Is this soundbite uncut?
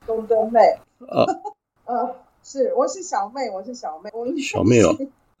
no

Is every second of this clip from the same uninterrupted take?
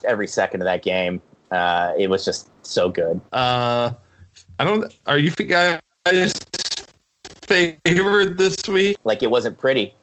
no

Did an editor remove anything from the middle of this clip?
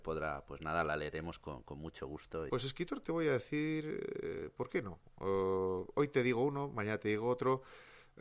yes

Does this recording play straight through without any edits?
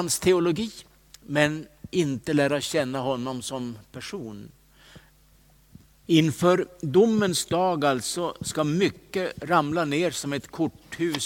no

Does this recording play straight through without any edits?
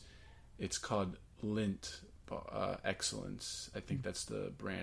yes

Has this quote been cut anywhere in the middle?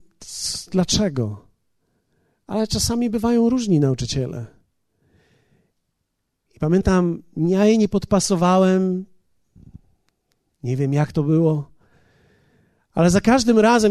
no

